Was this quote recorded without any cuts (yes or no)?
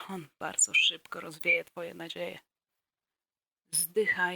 yes